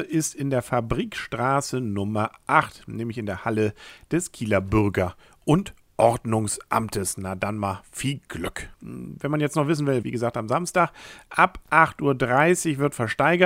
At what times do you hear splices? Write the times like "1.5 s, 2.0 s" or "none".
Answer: 8.7 s, 10.0 s